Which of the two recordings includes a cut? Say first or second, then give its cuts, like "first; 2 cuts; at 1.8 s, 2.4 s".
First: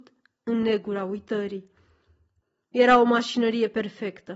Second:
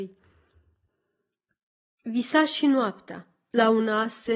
first; 1 cut; at 2.6 s